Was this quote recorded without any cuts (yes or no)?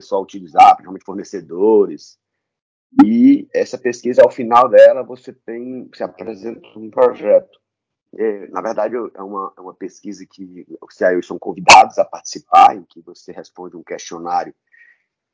no